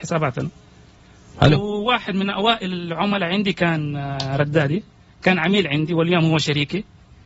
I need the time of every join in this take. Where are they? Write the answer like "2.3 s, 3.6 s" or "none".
none